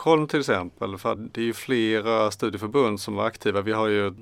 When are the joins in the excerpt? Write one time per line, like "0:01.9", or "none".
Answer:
0:01.2